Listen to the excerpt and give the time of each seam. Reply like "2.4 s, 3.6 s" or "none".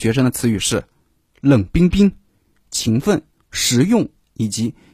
3.3 s

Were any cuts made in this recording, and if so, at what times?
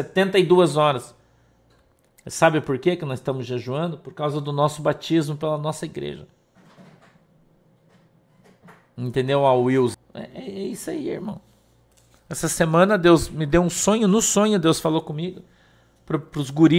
9.9 s

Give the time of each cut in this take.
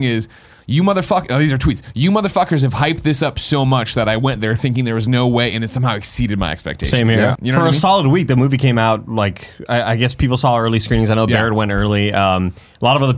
7.3 s

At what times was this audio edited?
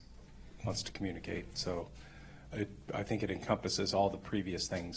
none

